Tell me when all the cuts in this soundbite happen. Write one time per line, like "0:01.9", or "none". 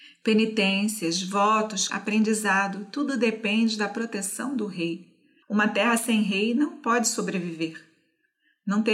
0:01.9
0:05.4